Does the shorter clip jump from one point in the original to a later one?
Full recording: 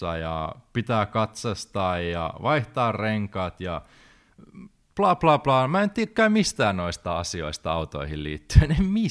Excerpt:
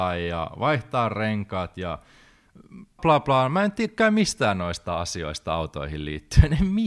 yes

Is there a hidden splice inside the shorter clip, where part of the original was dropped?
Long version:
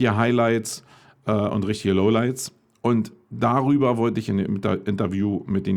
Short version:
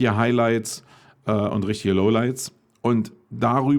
no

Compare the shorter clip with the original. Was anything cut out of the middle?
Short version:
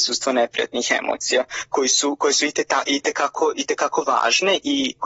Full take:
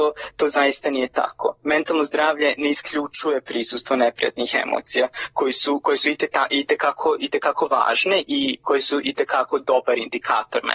no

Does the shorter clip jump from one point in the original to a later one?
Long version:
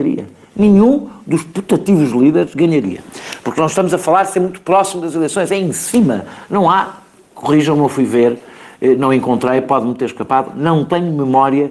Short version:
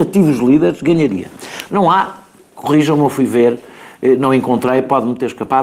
yes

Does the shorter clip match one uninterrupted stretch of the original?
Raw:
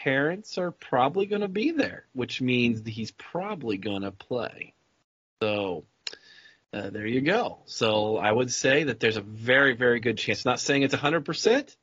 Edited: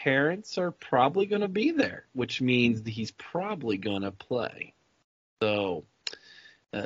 yes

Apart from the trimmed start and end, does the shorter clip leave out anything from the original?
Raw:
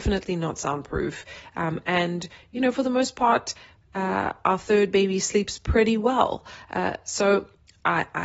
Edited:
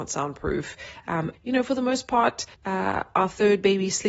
yes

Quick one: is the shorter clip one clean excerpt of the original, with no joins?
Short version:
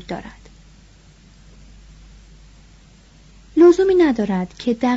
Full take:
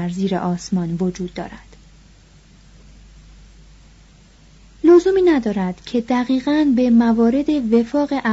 yes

